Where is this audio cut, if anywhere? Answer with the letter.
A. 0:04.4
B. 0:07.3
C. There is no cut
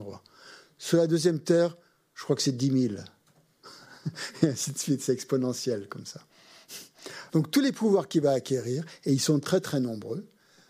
B